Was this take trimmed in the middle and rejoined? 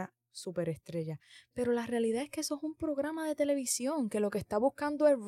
no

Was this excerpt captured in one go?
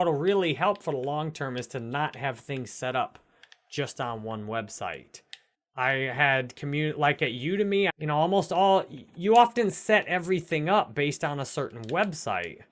no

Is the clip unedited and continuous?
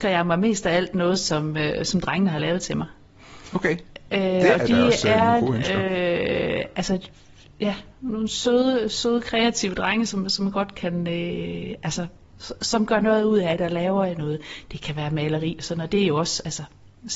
yes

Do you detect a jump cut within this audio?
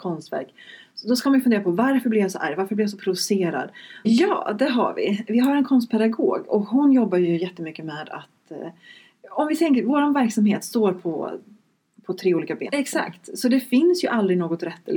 yes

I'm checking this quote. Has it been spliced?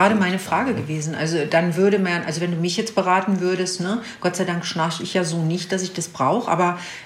no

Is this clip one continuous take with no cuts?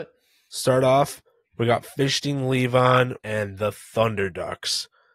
no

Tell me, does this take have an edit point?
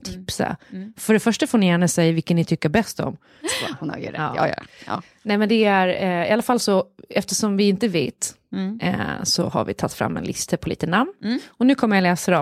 yes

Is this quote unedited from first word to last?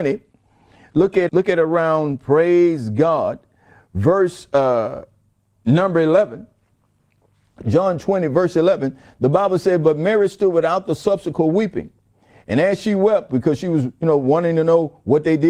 no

